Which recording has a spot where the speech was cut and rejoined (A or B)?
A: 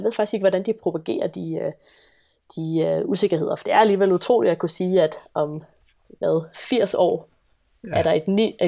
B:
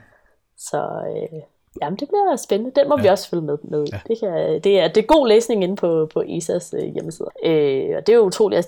B